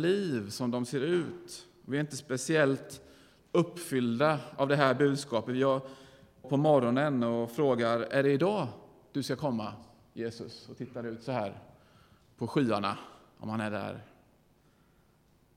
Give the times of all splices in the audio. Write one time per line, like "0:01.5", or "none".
0:06.4